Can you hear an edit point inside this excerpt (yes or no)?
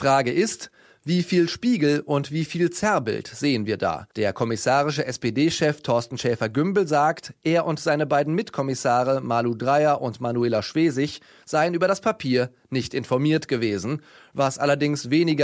yes